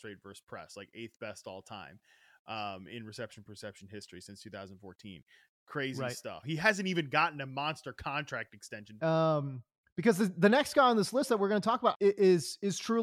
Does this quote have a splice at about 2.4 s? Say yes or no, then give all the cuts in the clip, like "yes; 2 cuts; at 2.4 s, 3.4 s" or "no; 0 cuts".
no; 3 cuts; at 6.4 s, 9.0 s, 11.9 s